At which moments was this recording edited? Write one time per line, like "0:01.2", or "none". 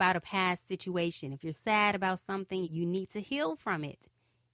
0:01.5
0:02.6